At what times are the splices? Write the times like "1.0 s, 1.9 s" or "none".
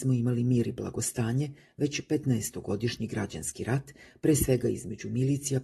none